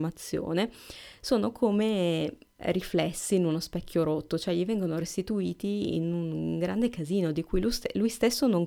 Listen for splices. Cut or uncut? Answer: uncut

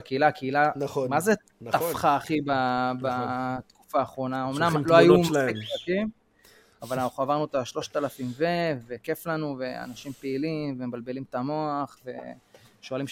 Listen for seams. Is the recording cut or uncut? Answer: uncut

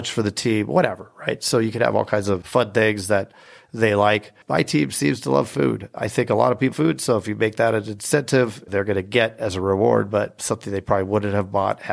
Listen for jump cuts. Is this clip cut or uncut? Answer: cut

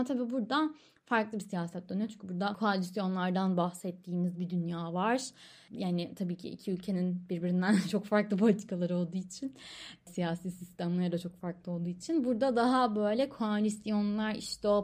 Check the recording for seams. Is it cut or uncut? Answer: uncut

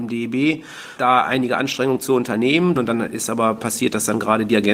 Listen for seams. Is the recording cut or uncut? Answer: cut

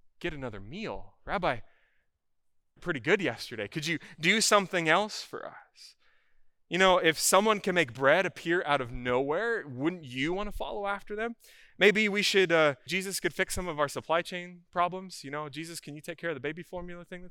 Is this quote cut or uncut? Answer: cut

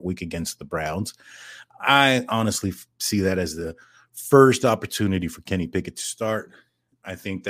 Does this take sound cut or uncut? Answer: uncut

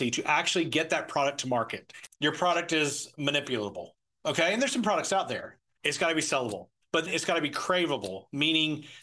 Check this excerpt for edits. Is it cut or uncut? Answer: cut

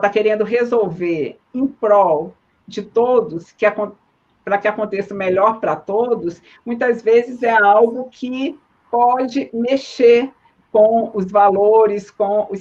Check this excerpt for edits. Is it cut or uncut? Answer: uncut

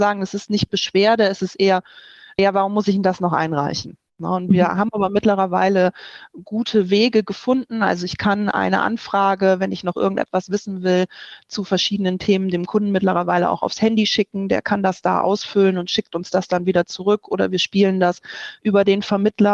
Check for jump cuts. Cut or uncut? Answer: cut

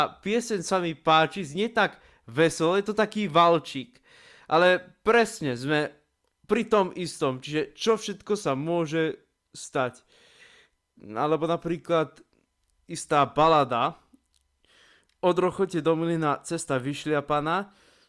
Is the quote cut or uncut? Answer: uncut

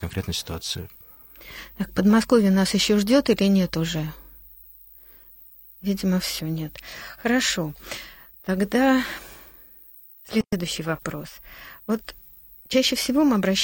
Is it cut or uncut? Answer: uncut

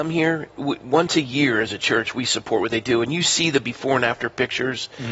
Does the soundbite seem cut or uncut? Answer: uncut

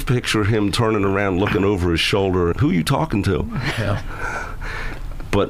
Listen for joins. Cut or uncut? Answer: cut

